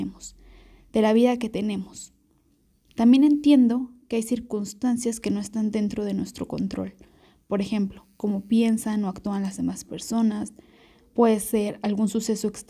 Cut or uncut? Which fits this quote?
cut